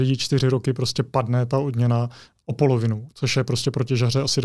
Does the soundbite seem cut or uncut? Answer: uncut